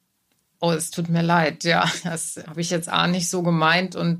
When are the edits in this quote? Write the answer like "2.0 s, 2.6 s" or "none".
2.4 s